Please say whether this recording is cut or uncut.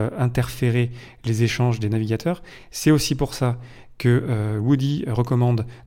uncut